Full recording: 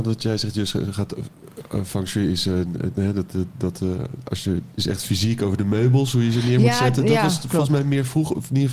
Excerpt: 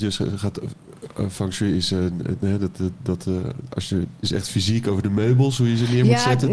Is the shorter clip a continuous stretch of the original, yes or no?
yes